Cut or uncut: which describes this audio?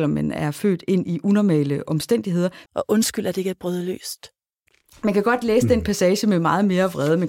cut